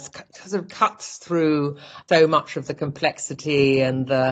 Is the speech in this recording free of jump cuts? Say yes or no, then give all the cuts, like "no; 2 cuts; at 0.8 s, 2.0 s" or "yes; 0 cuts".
yes; 0 cuts